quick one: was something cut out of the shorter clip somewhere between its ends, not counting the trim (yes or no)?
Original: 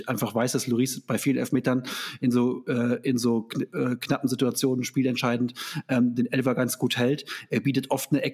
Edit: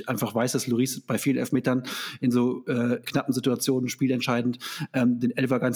yes